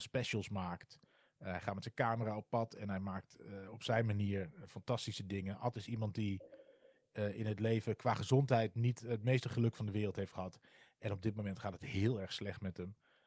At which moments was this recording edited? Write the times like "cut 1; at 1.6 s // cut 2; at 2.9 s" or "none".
none